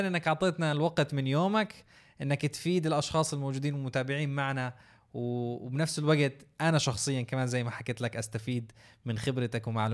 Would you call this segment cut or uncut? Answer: uncut